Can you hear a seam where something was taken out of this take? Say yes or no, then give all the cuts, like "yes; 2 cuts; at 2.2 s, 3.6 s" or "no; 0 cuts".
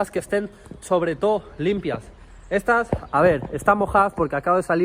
no; 0 cuts